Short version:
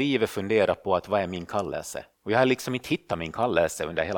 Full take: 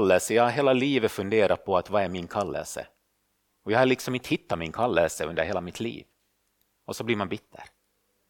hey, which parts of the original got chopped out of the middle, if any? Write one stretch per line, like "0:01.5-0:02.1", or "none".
0:03.0-0:03.5